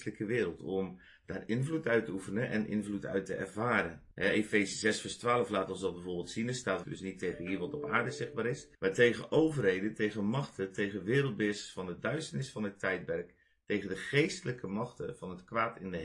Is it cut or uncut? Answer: cut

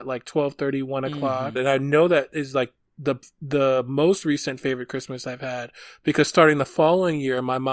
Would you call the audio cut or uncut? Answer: cut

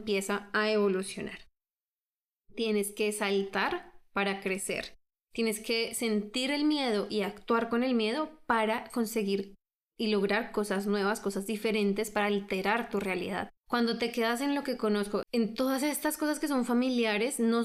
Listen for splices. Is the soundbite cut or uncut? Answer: cut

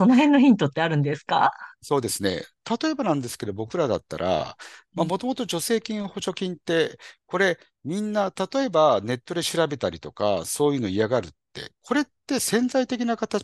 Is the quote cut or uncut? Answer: cut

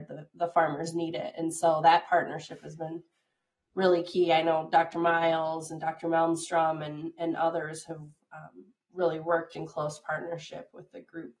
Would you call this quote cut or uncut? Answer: uncut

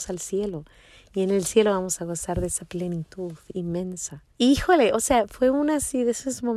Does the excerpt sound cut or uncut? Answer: cut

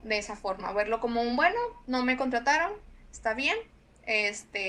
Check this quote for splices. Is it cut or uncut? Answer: uncut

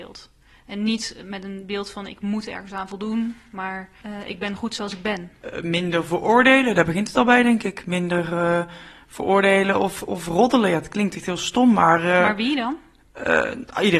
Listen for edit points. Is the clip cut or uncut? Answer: uncut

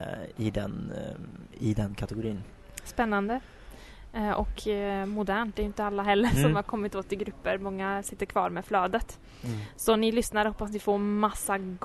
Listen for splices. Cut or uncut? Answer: uncut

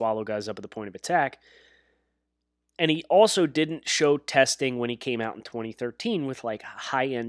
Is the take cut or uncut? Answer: uncut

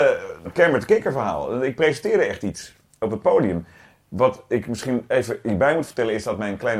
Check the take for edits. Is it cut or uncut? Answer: uncut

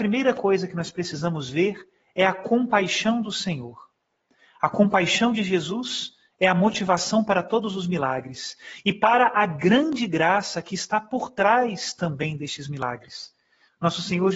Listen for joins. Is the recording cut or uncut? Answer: uncut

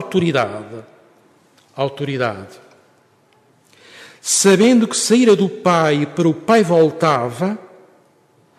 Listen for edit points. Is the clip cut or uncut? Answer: uncut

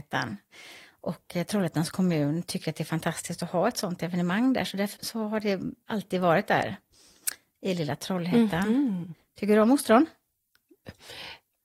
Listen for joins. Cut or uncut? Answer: cut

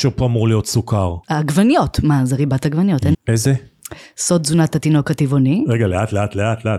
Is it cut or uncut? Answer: cut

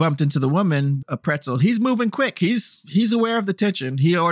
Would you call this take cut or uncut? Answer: cut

